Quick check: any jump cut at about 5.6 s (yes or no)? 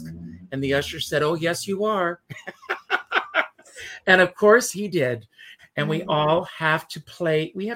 yes